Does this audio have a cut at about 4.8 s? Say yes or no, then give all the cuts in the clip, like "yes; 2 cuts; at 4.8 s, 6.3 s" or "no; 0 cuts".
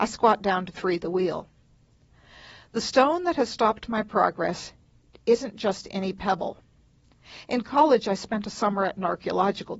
no; 0 cuts